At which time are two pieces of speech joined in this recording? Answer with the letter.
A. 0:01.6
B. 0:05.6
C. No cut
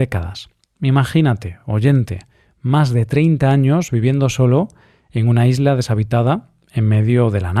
C